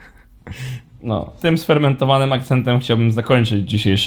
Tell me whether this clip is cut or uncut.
cut